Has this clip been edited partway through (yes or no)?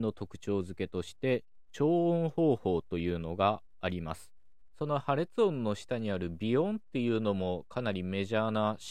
yes